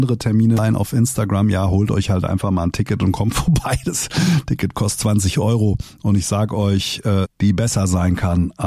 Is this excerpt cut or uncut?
cut